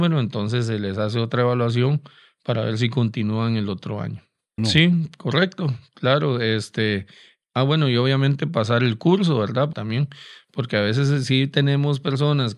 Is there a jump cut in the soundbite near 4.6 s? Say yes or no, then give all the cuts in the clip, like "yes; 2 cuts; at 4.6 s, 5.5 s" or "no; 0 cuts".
yes; 2 cuts; at 4.6 s, 9.7 s